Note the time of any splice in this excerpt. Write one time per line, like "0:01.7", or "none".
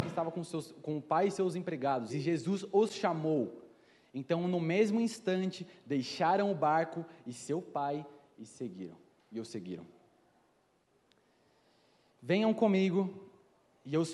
0:02.1